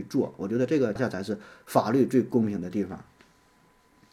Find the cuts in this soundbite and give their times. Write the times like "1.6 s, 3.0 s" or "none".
1.0 s